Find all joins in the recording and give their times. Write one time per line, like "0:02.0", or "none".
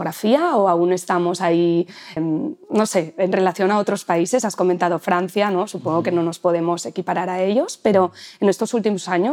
0:02.2